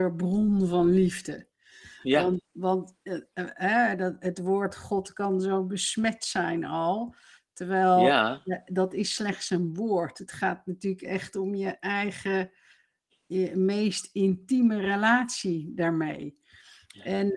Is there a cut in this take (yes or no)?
no